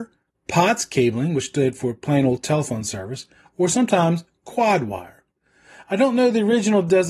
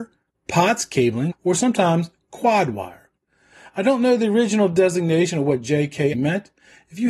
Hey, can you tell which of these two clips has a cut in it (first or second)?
second